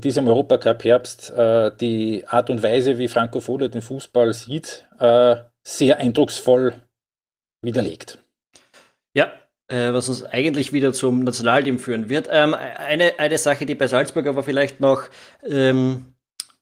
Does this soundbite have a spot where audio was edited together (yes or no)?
no